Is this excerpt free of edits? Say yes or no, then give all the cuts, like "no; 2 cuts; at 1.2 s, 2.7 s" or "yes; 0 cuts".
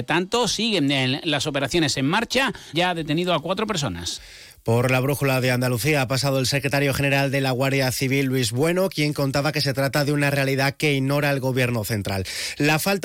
no; 1 cut; at 2.7 s